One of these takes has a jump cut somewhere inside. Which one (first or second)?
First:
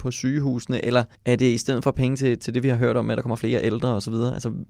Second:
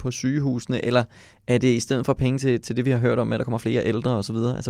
first